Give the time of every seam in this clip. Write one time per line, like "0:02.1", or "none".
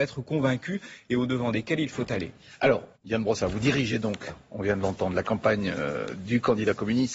0:03.0